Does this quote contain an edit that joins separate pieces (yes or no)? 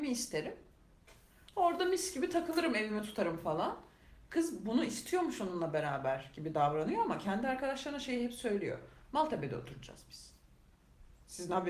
no